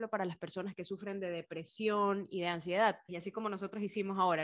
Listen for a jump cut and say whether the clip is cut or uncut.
cut